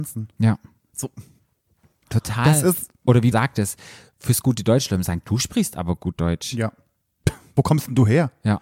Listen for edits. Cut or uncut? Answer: cut